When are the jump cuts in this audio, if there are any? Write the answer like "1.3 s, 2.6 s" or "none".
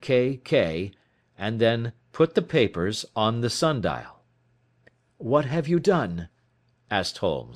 2.0 s